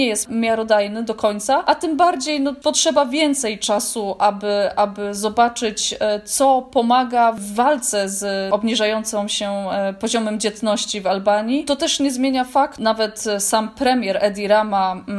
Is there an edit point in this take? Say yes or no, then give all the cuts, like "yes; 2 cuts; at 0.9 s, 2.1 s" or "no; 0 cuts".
no; 0 cuts